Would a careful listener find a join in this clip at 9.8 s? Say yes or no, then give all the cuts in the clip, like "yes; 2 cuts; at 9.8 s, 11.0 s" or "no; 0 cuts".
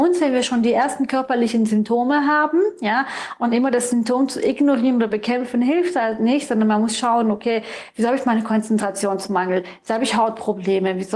no; 0 cuts